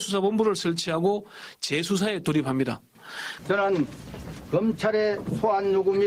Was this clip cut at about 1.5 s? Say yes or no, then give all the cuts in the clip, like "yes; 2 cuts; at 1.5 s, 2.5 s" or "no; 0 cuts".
no; 1 cut; at 3.4 s